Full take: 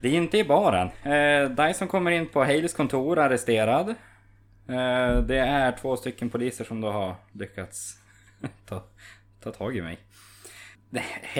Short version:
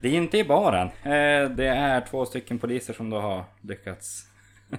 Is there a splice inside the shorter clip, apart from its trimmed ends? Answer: yes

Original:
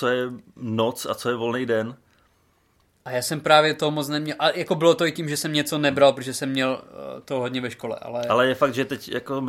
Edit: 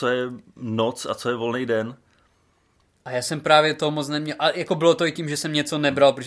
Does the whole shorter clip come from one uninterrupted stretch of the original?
yes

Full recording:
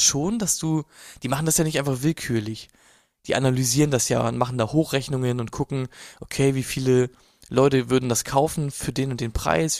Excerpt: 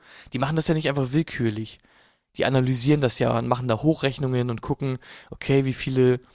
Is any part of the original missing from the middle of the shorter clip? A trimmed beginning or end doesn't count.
no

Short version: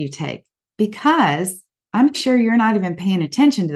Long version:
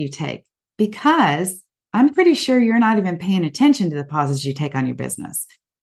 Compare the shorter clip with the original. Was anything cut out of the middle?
yes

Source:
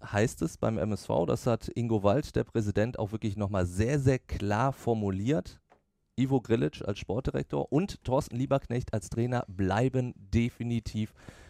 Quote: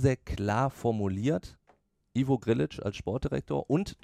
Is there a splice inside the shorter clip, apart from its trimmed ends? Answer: no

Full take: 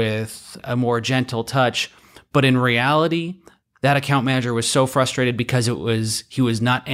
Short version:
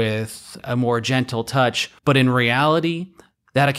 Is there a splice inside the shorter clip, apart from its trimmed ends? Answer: yes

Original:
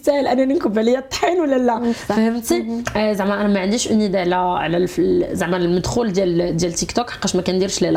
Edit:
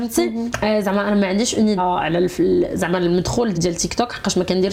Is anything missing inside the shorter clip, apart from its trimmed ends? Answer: yes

